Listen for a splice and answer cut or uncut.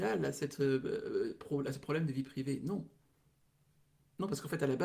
uncut